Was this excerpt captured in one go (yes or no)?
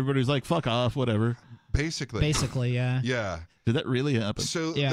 yes